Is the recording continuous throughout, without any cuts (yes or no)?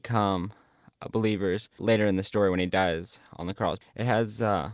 no